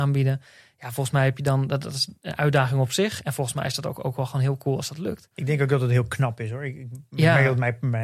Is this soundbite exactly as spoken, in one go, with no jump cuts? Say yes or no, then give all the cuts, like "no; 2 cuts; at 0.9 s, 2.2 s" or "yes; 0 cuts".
yes; 0 cuts